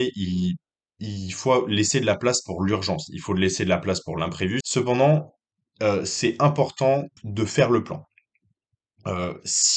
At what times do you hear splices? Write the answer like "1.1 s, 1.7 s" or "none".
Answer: 4.6 s, 7.2 s